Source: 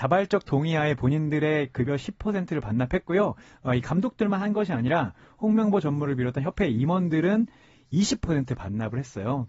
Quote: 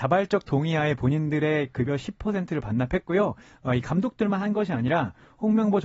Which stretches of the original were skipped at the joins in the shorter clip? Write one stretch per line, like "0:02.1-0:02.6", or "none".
none